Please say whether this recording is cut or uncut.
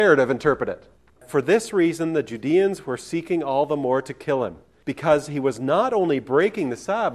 uncut